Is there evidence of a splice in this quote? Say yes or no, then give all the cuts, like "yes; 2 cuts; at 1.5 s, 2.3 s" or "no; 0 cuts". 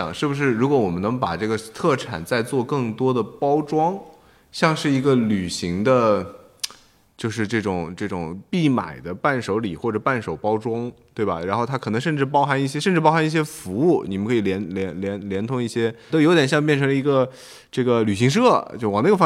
yes; 1 cut; at 16.1 s